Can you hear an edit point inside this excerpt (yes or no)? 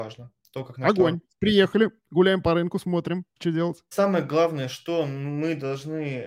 yes